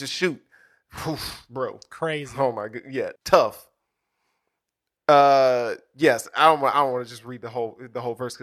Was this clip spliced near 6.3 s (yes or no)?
no